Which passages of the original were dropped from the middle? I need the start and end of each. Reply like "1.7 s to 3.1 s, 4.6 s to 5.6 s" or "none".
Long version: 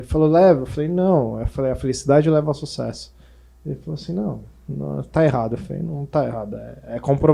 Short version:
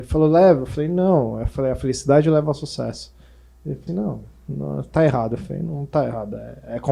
3.9 s to 4.1 s